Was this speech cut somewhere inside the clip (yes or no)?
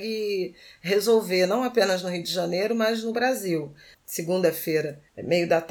yes